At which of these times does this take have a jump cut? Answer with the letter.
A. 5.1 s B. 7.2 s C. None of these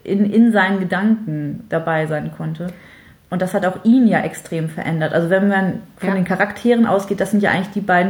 C